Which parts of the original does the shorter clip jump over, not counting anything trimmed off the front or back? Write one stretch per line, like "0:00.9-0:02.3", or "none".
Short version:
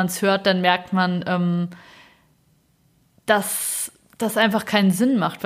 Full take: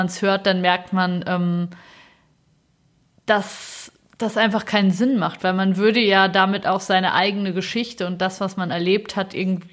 none